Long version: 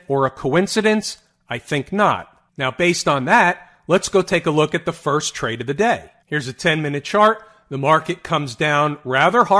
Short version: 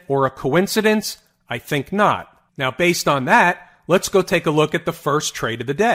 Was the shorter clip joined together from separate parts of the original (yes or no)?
no